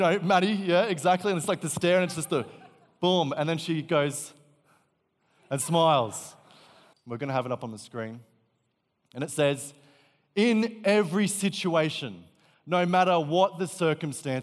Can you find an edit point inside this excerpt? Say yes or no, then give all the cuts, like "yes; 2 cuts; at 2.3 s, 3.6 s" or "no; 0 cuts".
yes; 1 cut; at 6.9 s